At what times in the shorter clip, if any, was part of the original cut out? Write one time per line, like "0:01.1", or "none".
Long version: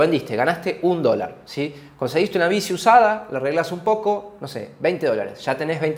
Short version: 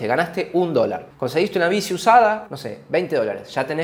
0:01.1
0:02.5